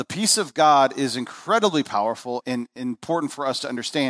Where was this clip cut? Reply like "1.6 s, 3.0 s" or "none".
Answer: 2.4 s